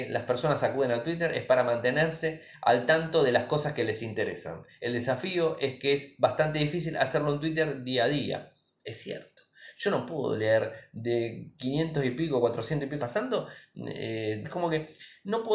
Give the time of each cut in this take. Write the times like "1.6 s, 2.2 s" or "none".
13.0 s, 14.4 s